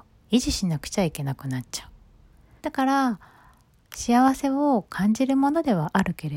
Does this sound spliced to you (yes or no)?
yes